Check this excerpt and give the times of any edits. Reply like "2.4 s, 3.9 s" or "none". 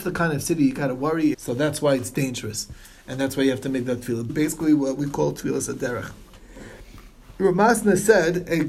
1.3 s, 4.3 s

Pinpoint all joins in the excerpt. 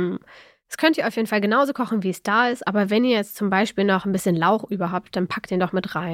none

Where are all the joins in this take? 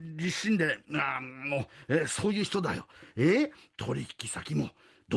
none

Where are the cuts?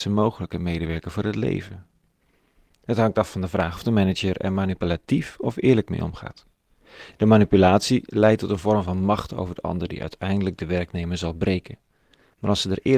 none

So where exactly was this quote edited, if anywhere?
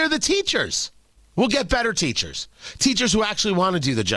none

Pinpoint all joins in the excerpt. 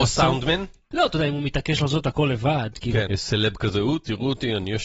0.9 s, 3.1 s

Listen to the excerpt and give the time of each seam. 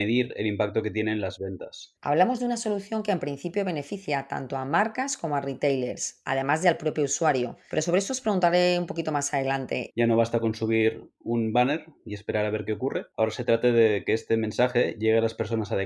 2.0 s, 9.9 s

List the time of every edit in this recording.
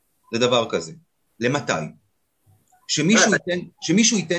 1.3 s

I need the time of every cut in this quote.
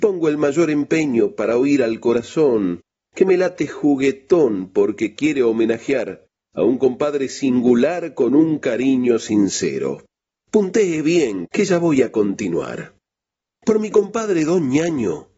11.5 s

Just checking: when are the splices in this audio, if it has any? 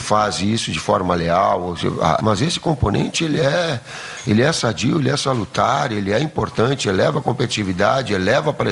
2.2 s

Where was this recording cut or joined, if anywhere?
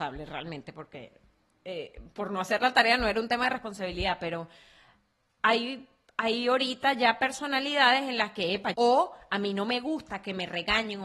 8.7 s

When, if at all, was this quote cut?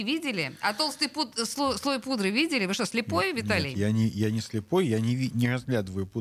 none

